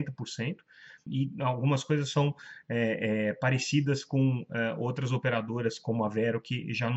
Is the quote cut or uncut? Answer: cut